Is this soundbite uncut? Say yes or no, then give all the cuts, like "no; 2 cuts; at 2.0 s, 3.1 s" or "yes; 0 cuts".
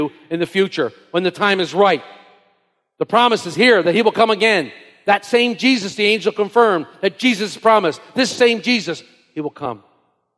yes; 0 cuts